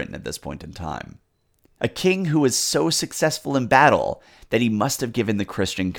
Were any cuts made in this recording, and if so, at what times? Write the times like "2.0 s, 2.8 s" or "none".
1.7 s